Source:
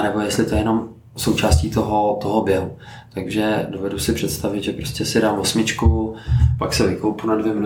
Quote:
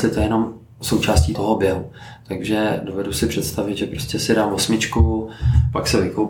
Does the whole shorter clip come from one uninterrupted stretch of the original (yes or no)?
no